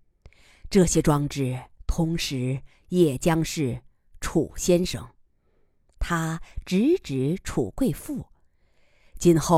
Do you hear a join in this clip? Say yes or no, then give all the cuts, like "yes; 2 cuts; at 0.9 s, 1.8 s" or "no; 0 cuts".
no; 0 cuts